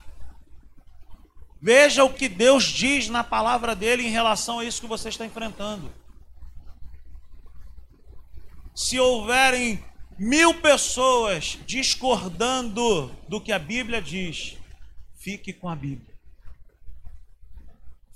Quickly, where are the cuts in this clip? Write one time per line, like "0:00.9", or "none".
0:02.1